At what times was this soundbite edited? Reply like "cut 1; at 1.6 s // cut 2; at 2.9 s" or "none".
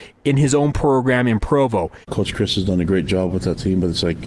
cut 1; at 2.0 s